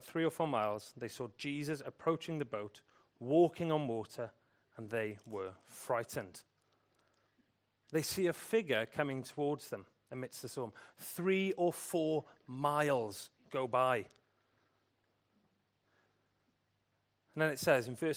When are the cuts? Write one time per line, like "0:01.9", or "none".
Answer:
0:10.9